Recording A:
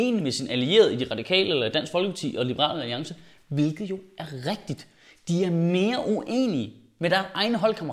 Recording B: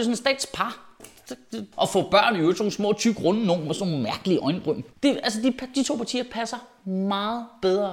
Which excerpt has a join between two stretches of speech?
B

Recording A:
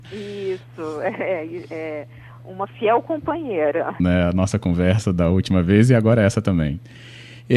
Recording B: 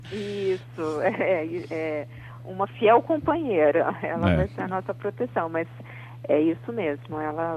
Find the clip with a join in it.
A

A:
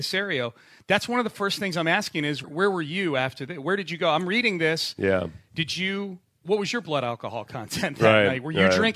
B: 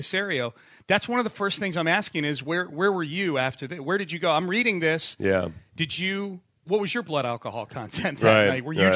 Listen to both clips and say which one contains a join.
A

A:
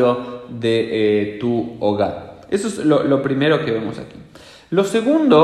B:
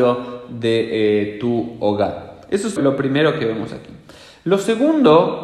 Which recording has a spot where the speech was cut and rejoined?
B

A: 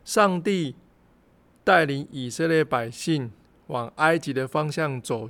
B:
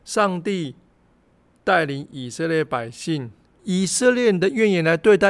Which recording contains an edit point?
B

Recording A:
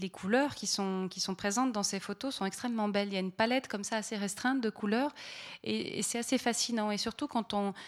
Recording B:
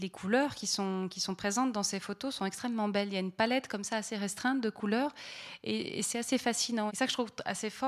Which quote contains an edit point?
B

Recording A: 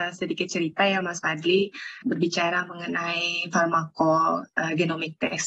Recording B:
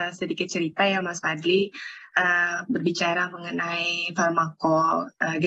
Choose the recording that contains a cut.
A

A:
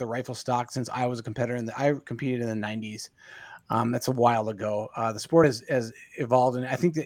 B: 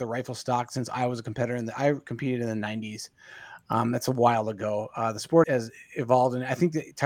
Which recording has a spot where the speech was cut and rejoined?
B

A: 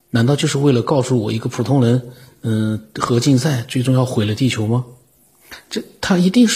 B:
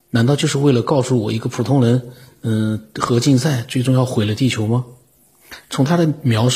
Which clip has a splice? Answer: B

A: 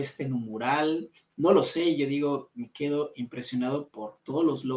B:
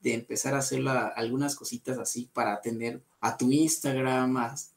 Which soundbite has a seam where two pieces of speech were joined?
B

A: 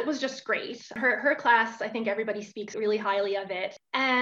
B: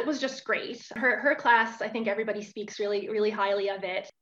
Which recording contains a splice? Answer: A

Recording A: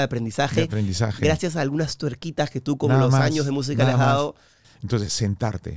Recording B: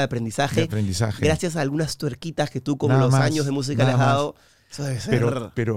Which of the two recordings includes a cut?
A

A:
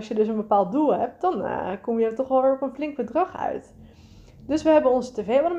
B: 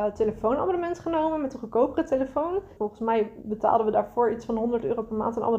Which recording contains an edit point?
B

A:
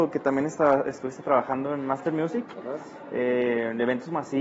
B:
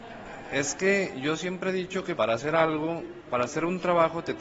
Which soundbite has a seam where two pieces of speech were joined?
B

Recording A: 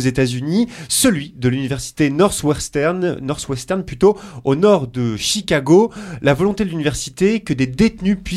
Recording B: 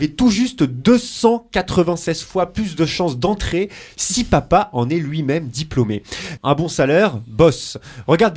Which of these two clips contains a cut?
B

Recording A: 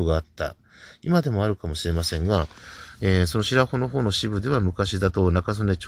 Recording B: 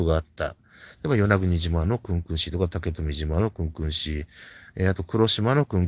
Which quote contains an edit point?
B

